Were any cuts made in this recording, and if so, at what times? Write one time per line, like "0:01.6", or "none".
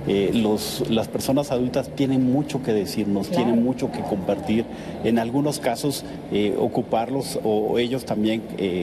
none